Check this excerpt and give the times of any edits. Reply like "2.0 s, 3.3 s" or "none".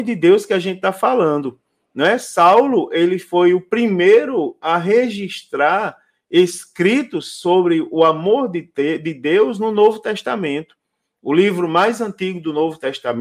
none